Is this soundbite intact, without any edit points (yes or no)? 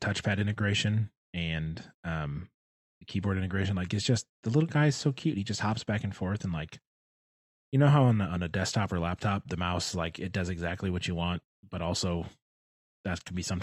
no